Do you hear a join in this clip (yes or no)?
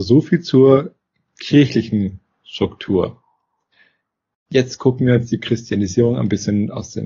no